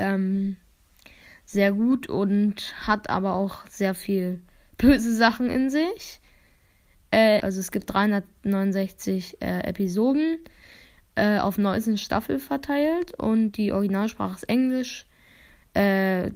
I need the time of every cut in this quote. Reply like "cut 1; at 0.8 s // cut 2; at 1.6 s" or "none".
cut 1; at 7.4 s